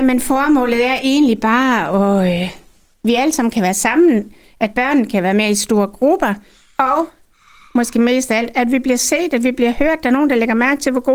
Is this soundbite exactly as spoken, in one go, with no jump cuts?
yes; 0 cuts

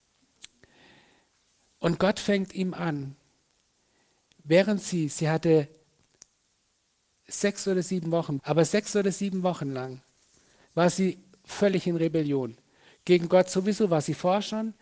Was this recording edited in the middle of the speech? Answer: yes; 1 cut; at 8.4 s

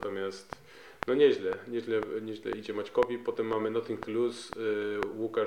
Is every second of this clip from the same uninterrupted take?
yes; 0 cuts

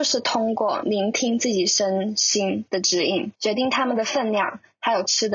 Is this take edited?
yes; 1 cut; at 3.3 s

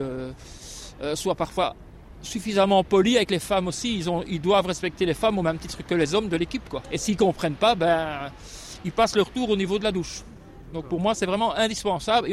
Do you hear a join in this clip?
yes; 1 cut; at 6.8 s

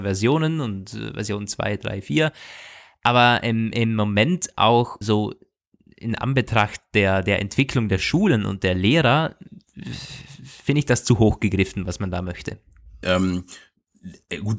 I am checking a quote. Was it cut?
yes; 2 cuts; at 5.0 s, 13.0 s

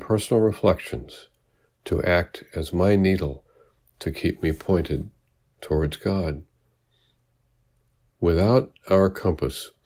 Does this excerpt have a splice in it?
yes; 1 cut; at 8.1 s

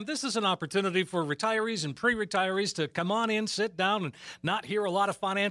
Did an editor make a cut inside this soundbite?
no; 0 cuts

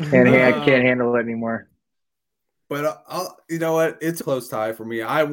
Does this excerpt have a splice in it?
yes; 1 cut; at 4.2 s

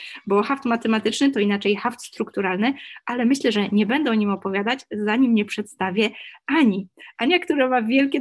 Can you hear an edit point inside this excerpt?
no; 0 cuts

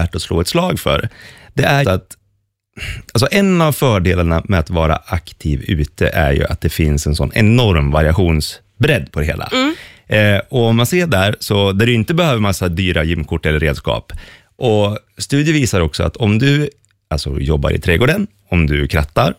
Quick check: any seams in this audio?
yes; 1 cut; at 1.8 s

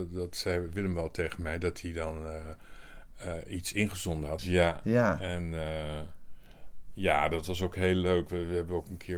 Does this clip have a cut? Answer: yes; 1 cut; at 4.4 s

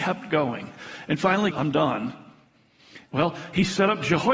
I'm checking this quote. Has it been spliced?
yes; 2 cuts; at 1.5 s, 3.1 s

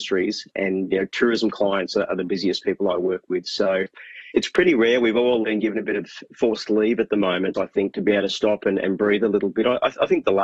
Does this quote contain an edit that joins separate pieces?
yes; 3 cuts; at 4.3 s, 5.4 s, 7.5 s

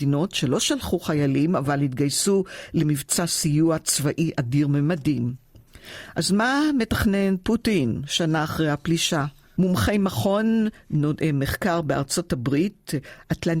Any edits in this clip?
yes; 1 cut; at 9.6 s

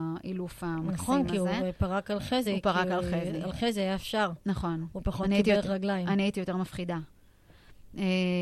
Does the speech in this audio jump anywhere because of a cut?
no; 0 cuts

